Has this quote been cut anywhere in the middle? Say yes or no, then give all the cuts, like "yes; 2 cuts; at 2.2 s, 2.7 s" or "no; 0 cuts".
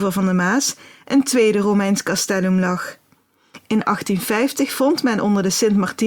no; 0 cuts